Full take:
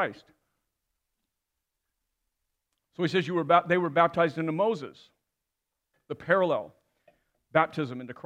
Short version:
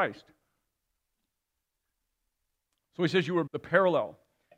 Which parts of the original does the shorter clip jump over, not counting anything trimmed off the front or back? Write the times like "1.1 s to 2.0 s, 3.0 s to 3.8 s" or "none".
3.5 s to 6.0 s